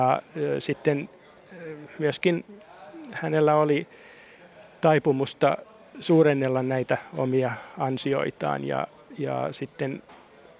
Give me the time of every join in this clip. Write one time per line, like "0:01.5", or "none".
none